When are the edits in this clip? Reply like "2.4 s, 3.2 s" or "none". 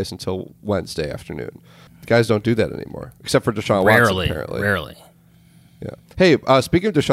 1.9 s